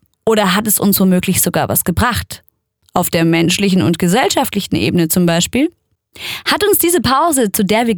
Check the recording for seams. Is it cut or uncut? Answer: uncut